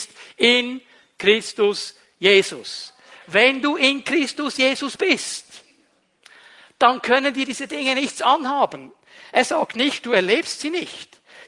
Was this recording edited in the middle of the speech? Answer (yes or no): no